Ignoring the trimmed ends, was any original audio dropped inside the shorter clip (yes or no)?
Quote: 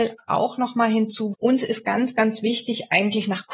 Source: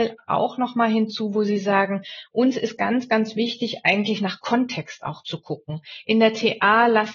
yes